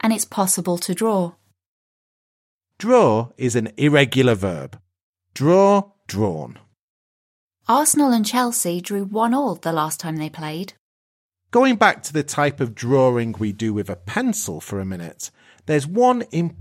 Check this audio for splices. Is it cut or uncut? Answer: cut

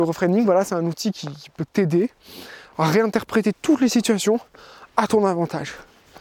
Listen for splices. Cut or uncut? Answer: uncut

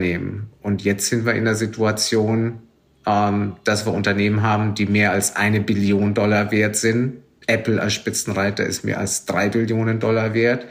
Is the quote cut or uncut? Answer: uncut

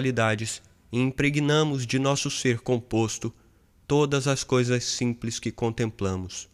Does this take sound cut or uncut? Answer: uncut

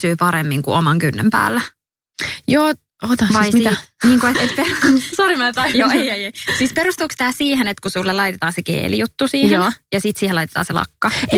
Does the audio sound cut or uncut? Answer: cut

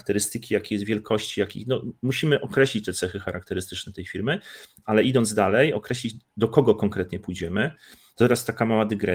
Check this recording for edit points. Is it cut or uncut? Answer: uncut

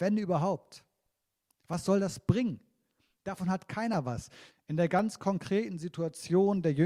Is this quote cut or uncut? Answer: cut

